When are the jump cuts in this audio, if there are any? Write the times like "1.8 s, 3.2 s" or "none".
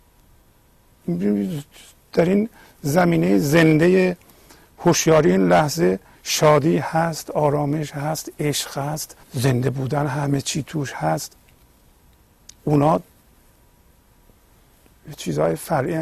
9.2 s